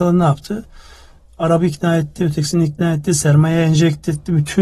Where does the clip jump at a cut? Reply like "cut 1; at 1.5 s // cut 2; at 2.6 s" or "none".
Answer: none

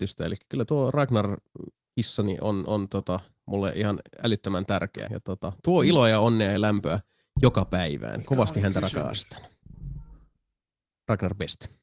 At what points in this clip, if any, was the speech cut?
cut 1; at 5.1 s

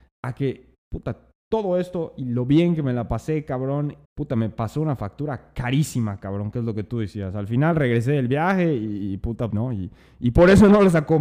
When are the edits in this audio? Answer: cut 1; at 4.0 s // cut 2; at 9.5 s

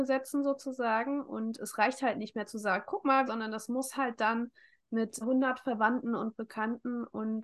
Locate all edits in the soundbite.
cut 1; at 3.3 s // cut 2; at 5.2 s

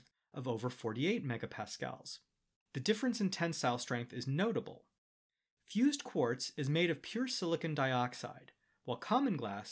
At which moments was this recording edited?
cut 1; at 2.5 s // cut 2; at 5.4 s

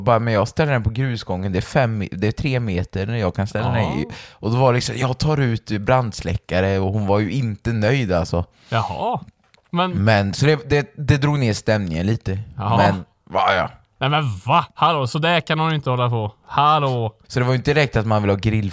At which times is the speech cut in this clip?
cut 1; at 17.2 s

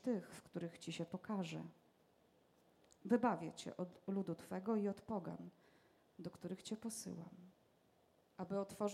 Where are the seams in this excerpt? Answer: none

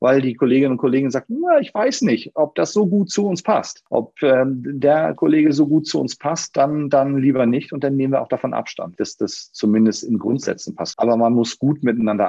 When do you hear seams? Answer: cut 1; at 9.0 s // cut 2; at 10.9 s

